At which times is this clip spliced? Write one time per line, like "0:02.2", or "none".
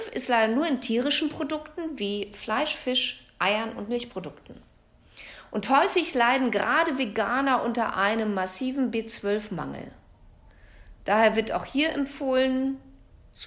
none